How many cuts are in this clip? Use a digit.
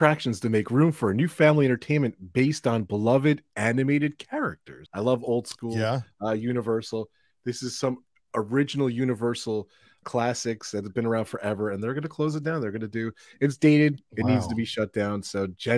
2